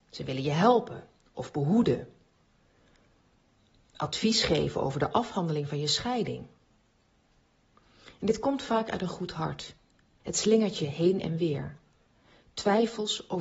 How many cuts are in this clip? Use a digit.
1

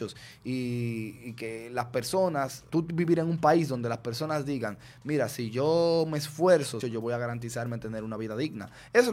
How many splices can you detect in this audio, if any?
2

